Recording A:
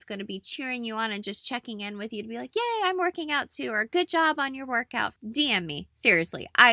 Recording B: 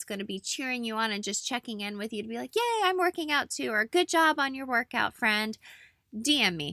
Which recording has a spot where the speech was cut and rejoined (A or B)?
A